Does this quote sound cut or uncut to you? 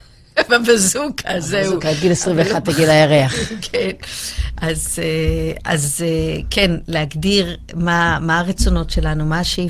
uncut